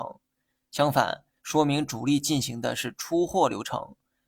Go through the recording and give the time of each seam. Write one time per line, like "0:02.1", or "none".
0:01.4